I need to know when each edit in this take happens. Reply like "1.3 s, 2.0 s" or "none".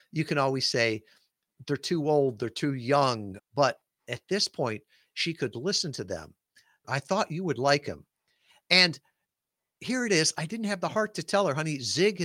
3.4 s, 6.8 s